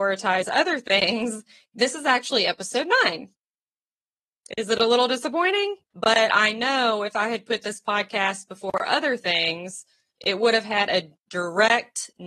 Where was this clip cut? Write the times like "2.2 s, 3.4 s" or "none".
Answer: 5.9 s